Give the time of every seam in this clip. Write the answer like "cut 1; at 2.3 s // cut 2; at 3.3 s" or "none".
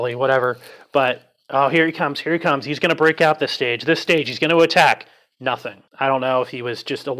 cut 1; at 5.9 s